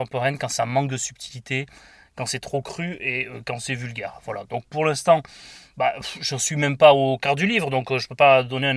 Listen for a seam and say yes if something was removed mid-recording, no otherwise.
no